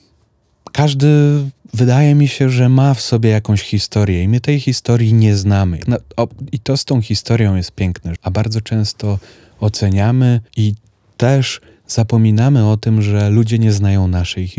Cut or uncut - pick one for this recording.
cut